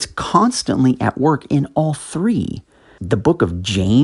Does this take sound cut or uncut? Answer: cut